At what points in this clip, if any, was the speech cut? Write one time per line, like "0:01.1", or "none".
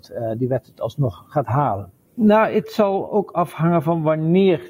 0:02.0